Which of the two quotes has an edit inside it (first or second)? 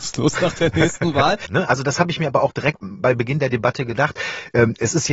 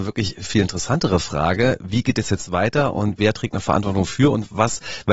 first